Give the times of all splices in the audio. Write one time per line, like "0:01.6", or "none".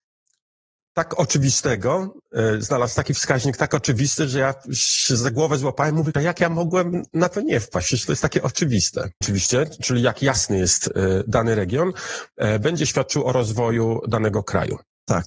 0:06.1
0:09.2